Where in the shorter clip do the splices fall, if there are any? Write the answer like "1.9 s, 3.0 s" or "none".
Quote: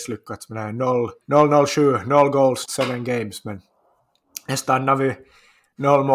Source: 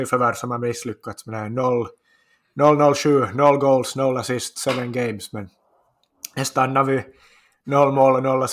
1.2 s, 2.7 s